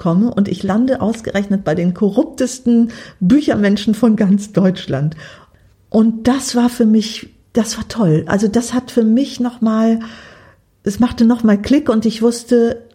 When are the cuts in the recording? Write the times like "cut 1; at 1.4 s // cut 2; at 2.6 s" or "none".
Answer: cut 1; at 5.7 s

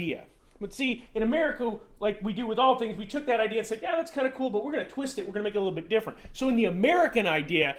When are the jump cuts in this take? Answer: none

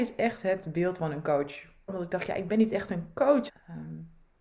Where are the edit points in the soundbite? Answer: cut 1; at 1.9 s // cut 2; at 3.5 s

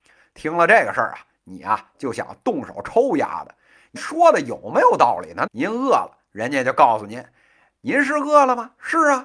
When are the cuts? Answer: cut 1; at 4.0 s // cut 2; at 5.5 s

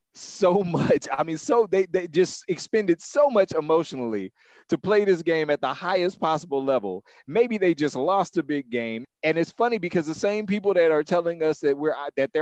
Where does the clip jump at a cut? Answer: cut 1; at 9.0 s

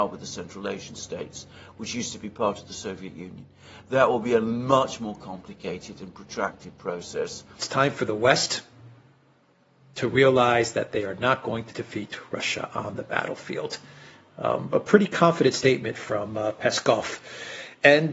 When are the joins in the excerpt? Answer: cut 1; at 7.6 s

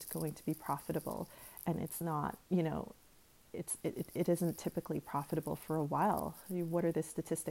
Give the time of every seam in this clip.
cut 1; at 2.4 s

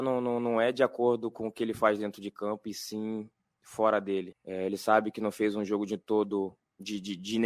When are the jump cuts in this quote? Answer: cut 1; at 4.3 s

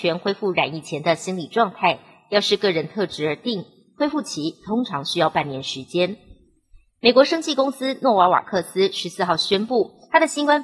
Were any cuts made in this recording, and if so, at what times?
none

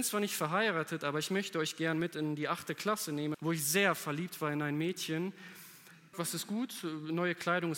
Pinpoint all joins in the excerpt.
cut 1; at 3.3 s // cut 2; at 6.1 s

